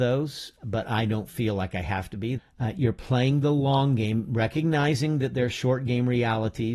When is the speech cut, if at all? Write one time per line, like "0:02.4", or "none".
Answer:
0:02.4